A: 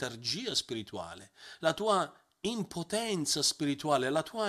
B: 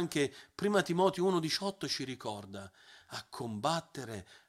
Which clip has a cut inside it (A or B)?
A